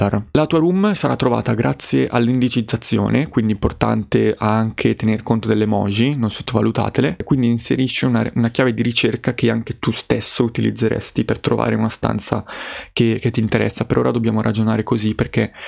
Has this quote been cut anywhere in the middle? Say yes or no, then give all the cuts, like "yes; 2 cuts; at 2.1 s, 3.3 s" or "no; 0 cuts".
no; 0 cuts